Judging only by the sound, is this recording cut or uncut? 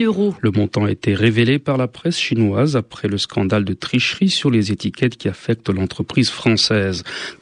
uncut